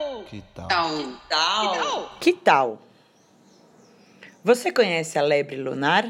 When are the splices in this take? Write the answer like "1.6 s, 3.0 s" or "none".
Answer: none